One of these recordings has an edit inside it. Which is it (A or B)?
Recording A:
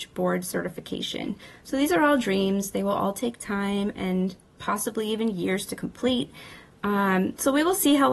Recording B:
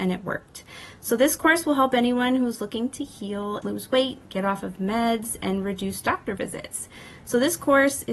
B